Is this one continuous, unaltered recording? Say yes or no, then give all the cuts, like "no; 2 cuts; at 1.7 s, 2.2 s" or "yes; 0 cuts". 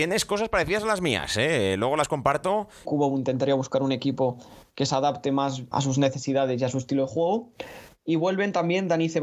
no; 2 cuts; at 2.8 s, 5.7 s